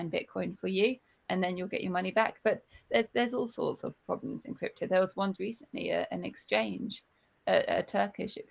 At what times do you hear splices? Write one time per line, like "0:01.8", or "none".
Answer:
0:05.4